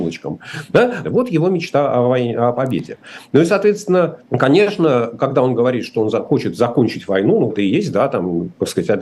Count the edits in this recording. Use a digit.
3